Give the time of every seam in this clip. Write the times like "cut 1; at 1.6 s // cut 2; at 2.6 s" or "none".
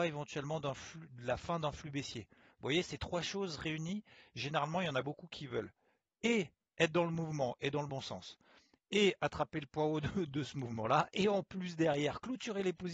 none